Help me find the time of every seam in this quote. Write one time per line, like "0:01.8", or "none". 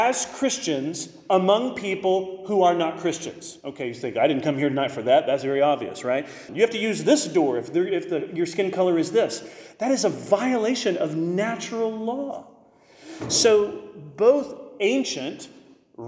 0:06.5